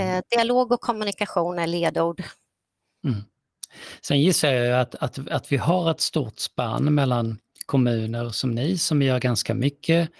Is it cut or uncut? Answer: uncut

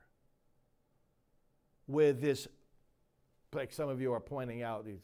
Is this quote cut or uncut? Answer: uncut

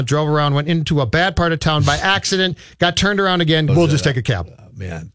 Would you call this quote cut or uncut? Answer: cut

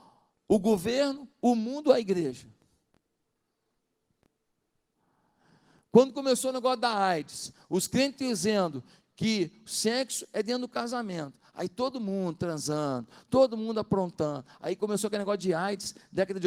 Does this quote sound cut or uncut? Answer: uncut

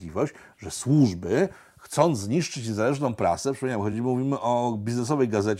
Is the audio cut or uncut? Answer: uncut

